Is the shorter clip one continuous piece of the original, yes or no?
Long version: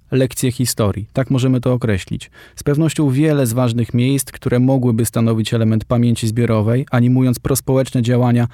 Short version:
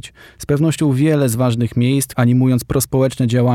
no